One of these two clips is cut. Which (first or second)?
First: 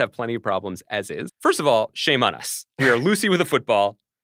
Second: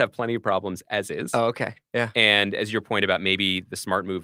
first